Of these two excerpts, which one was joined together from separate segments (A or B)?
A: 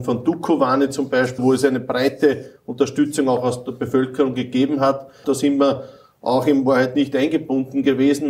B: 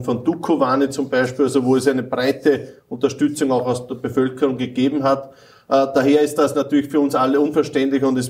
A